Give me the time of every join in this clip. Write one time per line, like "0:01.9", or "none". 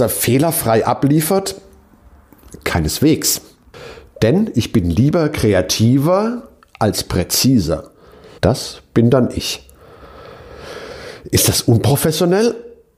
0:08.4